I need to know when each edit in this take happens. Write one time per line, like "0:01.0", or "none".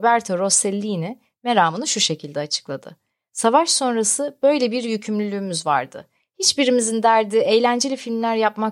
none